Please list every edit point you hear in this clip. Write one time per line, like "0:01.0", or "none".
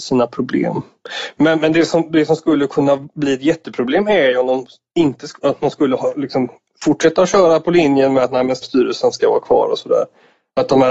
0:08.6